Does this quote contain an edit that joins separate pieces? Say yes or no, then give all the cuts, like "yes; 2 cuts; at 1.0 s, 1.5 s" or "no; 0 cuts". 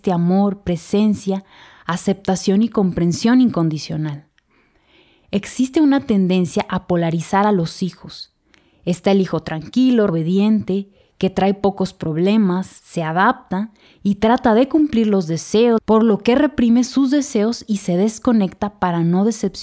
yes; 2 cuts; at 10.1 s, 15.8 s